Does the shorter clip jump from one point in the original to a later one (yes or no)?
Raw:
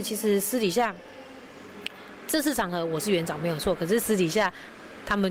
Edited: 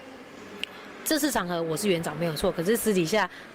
no